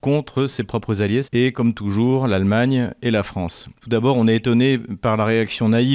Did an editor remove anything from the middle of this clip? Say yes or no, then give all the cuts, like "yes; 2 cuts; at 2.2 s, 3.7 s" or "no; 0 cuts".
yes; 2 cuts; at 1.2 s, 3.8 s